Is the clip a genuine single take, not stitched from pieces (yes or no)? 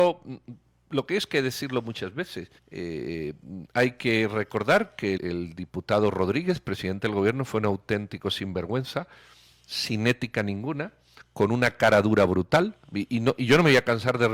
no